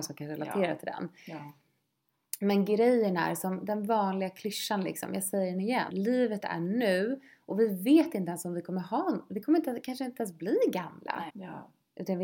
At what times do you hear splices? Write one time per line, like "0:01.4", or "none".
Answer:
0:05.9
0:11.3